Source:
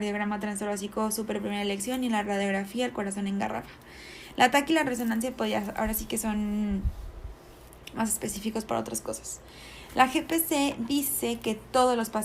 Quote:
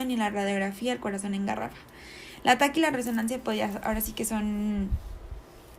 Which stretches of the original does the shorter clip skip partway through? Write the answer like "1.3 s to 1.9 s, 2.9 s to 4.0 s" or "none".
none